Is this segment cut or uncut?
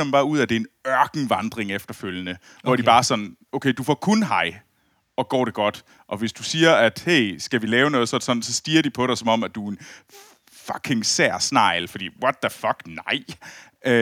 uncut